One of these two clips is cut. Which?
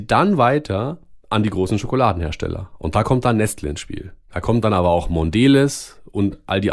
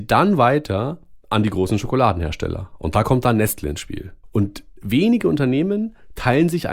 second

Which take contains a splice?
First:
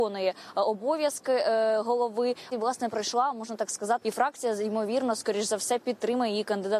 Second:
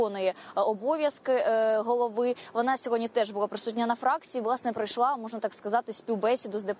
first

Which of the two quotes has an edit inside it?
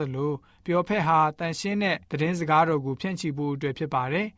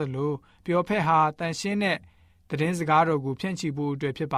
first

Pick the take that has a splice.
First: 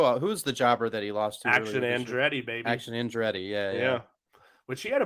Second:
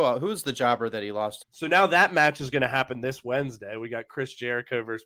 second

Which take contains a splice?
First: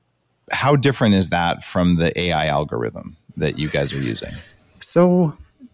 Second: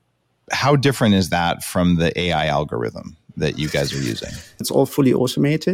second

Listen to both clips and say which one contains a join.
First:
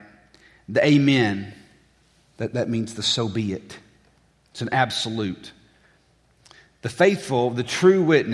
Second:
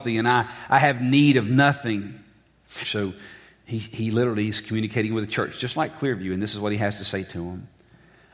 second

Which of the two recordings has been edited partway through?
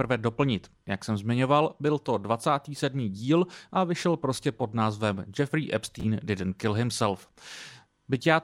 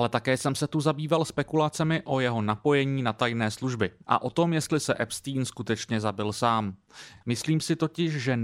second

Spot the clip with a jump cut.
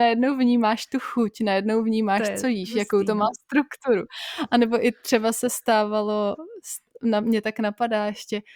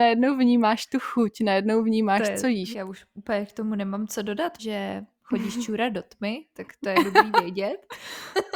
second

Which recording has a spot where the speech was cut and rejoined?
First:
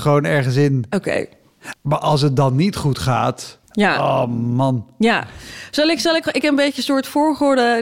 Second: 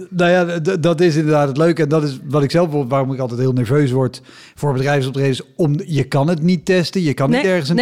first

